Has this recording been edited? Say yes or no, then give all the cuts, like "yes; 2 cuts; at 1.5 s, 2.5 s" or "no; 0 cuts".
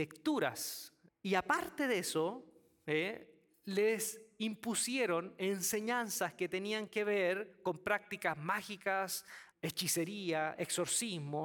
yes; 2 cuts; at 1.1 s, 9.5 s